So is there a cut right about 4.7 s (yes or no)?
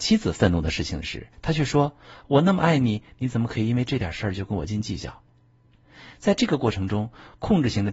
yes